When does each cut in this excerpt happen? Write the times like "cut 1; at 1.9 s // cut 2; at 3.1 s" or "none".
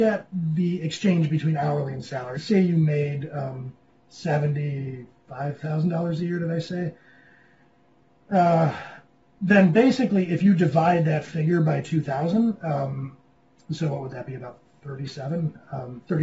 cut 1; at 2.3 s